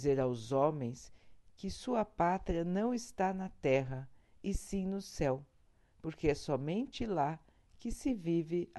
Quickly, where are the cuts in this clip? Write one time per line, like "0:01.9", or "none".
none